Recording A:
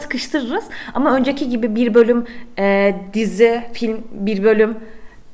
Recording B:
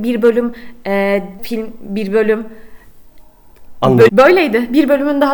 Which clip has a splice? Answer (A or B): B